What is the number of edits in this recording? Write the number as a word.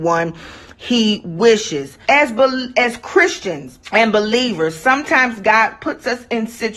two